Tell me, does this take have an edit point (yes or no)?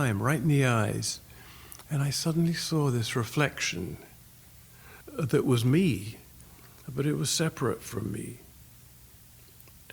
yes